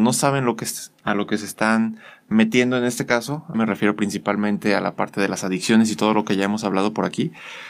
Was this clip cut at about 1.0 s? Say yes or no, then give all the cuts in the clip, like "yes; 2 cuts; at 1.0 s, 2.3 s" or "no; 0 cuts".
no; 1 cut; at 3.5 s